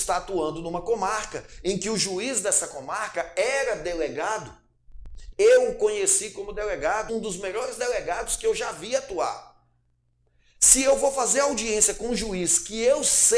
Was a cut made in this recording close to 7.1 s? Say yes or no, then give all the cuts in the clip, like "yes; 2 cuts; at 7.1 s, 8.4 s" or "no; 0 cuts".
yes; 2 cuts; at 5.3 s, 7.1 s